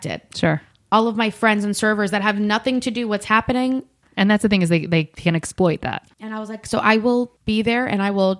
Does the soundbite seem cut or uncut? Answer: cut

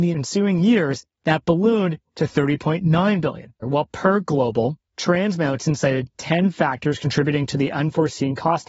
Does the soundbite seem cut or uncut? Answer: cut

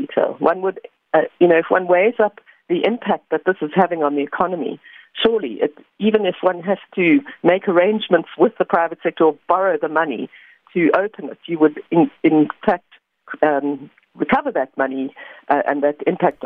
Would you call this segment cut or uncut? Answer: uncut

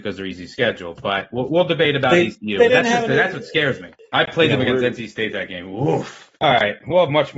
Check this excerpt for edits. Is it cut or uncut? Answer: uncut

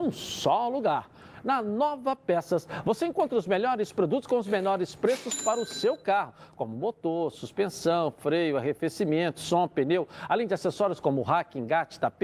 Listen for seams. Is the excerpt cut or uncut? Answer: uncut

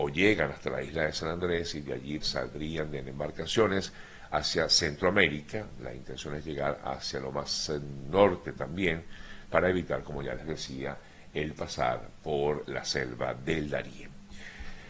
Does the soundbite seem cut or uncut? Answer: cut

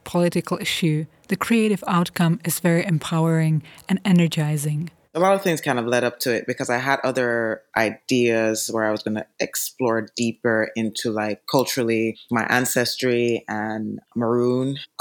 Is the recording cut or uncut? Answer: cut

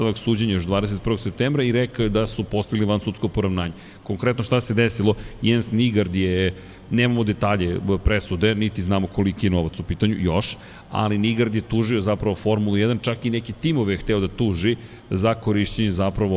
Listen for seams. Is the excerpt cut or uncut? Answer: uncut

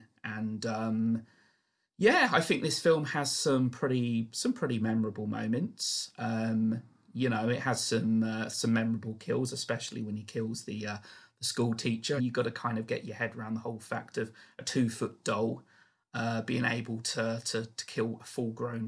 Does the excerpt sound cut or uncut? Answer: cut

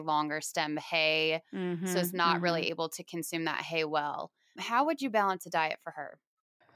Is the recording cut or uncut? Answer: uncut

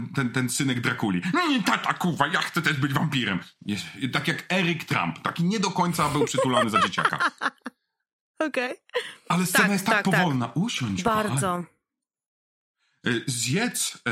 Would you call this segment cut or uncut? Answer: uncut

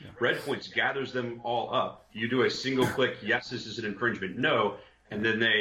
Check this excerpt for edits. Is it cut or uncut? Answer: uncut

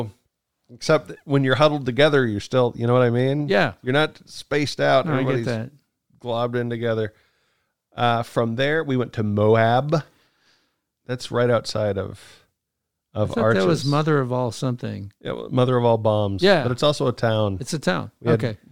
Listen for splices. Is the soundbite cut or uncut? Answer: uncut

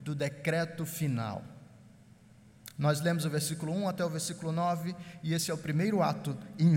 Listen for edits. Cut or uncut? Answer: uncut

